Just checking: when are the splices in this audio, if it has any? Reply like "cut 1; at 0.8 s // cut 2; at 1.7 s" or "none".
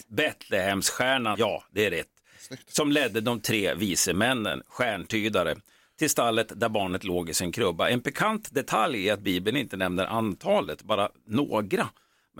cut 1; at 1.3 s